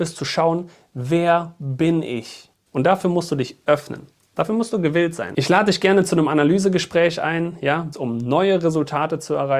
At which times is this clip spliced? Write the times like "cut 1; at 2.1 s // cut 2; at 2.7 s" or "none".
cut 1; at 2.7 s // cut 2; at 7.9 s